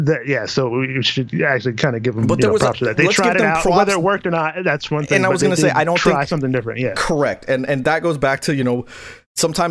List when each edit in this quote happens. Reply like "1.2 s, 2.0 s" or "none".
none